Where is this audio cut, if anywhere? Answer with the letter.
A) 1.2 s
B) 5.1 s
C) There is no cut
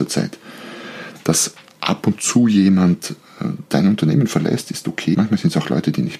B